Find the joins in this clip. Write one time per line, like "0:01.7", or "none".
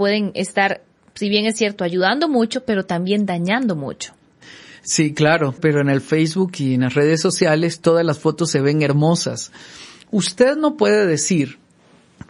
0:05.6